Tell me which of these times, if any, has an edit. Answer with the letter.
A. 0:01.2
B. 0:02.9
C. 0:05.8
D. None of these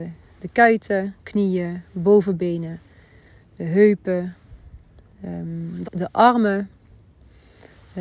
C